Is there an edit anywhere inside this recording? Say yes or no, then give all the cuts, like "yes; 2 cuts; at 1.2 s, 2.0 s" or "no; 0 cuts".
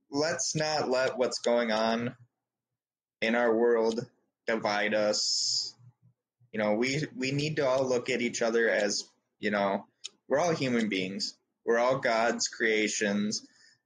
no; 0 cuts